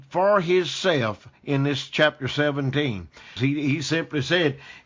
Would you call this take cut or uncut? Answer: cut